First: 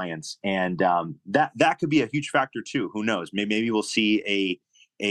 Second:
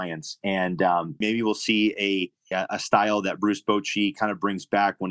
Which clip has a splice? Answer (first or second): second